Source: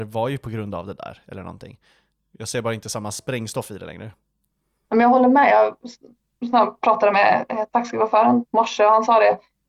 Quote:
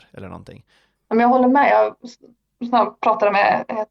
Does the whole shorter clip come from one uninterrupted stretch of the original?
no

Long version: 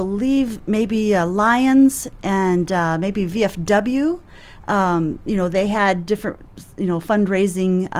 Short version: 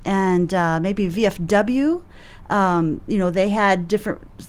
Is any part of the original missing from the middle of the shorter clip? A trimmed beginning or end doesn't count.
no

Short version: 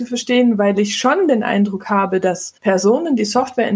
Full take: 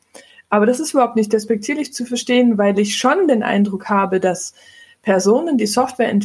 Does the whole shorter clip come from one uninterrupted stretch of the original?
no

